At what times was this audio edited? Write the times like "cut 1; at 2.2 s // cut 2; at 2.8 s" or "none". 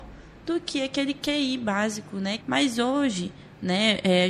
cut 1; at 2.4 s